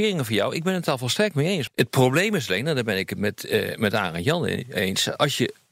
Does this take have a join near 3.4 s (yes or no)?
no